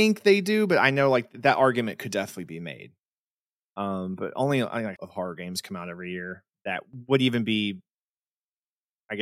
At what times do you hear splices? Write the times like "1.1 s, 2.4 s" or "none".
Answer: 4.9 s